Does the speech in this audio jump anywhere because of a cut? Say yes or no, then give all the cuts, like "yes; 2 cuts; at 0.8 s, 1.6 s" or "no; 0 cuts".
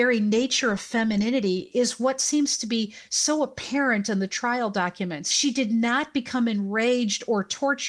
no; 0 cuts